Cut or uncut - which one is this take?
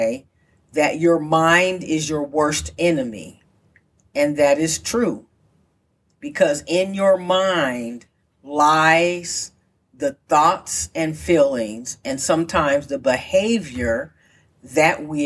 uncut